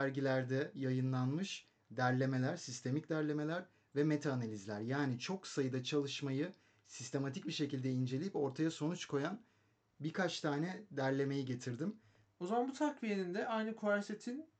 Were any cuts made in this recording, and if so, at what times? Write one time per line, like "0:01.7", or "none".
0:12.3